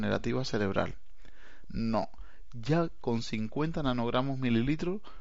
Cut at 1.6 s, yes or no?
yes